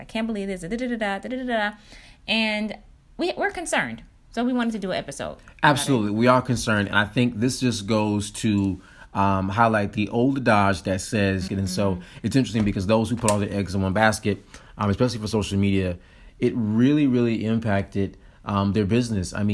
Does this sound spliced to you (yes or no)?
yes